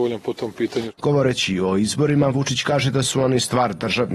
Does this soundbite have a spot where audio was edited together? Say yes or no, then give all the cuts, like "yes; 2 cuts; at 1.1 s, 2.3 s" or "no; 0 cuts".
yes; 1 cut; at 1.0 s